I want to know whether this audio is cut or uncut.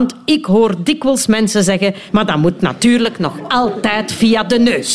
cut